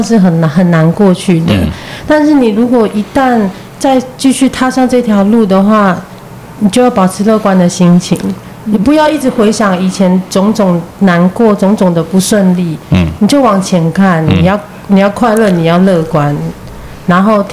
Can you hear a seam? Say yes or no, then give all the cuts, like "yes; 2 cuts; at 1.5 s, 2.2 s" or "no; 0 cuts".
no; 0 cuts